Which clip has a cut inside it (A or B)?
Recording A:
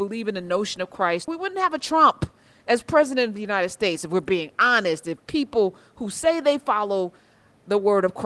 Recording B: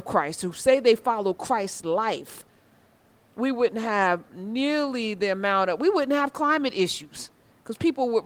A